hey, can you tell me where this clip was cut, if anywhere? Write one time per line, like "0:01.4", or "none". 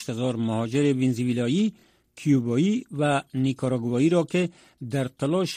none